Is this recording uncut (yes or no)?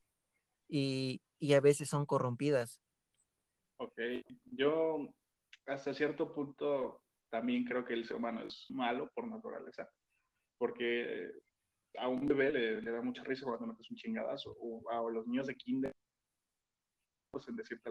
no